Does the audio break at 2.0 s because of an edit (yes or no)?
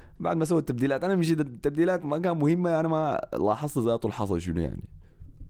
yes